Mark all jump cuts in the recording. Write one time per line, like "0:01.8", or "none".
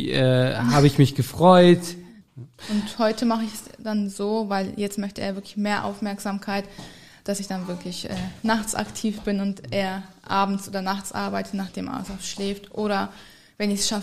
0:02.2